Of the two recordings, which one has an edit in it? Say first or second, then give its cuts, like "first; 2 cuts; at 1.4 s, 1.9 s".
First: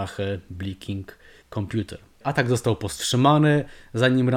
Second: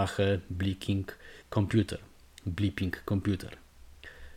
first; 1 cut; at 2.2 s